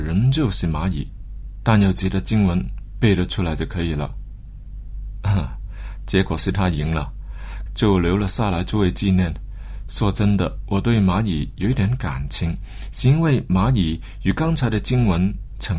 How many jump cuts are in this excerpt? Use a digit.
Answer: 1